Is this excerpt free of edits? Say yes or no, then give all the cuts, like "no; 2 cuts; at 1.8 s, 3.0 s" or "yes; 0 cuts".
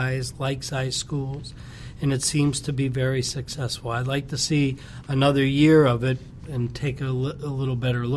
yes; 0 cuts